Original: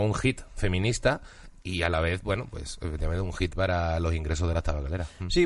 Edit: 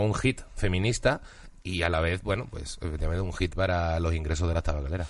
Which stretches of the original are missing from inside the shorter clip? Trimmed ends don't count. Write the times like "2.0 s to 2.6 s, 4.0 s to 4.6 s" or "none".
none